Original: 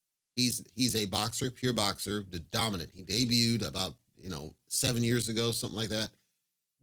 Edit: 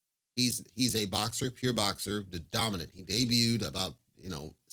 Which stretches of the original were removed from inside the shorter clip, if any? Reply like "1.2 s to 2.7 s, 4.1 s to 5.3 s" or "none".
none